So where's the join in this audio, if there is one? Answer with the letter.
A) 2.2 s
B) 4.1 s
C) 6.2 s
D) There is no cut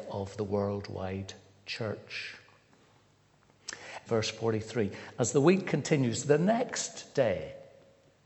B